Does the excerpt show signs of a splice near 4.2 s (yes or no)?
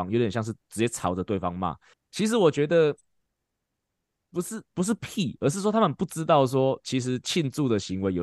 no